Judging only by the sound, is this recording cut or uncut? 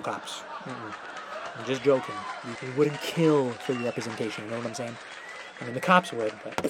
cut